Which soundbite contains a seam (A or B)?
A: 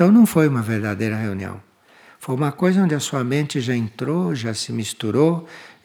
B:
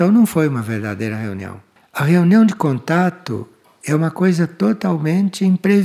B